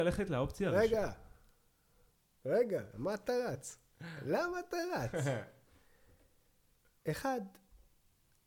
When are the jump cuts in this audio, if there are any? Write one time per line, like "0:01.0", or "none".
none